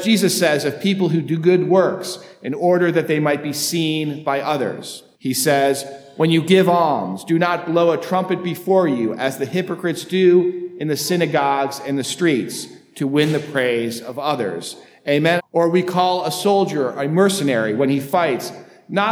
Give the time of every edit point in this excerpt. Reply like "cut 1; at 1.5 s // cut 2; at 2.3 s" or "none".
cut 1; at 5.1 s // cut 2; at 15.4 s